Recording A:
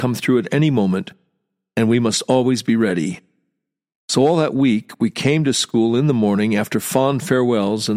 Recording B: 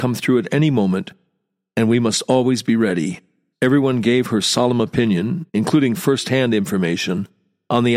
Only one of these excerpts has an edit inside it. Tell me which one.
B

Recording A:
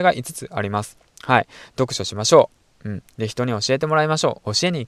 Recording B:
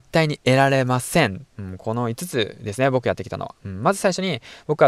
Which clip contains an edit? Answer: B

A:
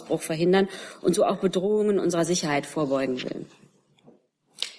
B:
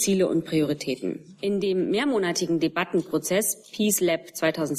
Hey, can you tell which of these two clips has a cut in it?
B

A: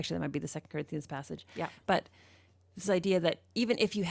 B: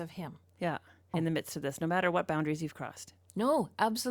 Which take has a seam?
B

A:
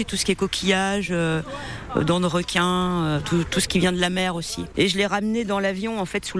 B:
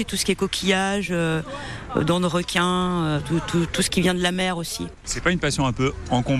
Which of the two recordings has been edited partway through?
A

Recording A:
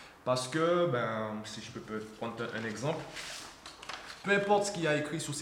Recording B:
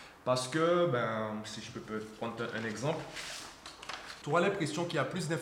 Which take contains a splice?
B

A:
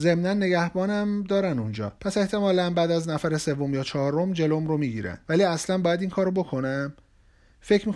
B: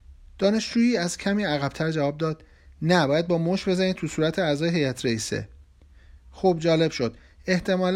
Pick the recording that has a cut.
A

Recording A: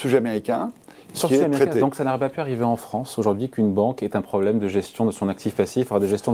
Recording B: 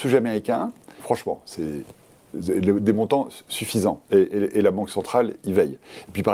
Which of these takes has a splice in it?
B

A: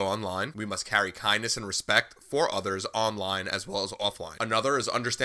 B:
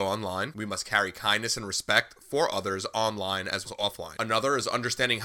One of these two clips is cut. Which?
B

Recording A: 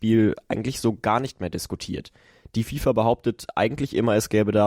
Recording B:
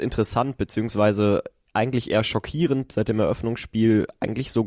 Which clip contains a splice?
B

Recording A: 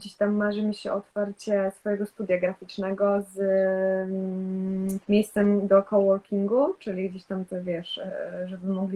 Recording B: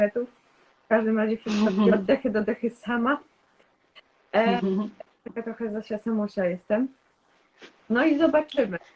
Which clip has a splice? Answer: A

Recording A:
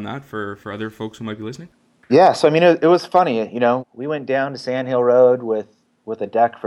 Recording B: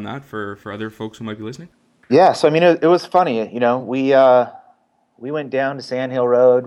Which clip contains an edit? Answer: A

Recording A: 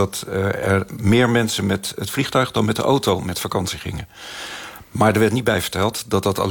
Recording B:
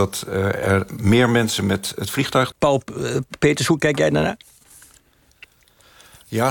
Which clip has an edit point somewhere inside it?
B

